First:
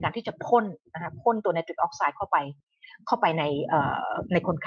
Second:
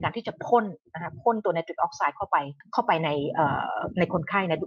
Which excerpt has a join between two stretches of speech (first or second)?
second